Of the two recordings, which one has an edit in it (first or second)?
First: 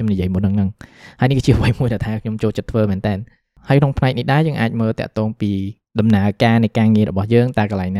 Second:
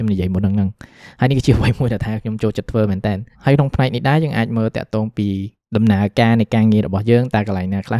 second